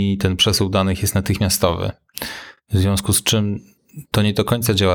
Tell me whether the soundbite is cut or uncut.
uncut